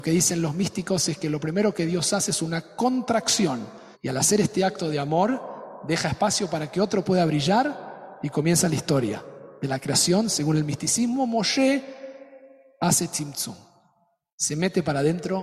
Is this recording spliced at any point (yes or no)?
yes